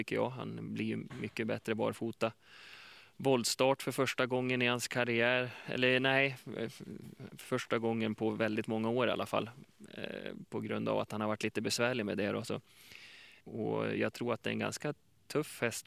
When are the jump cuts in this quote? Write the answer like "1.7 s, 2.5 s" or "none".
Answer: 13.4 s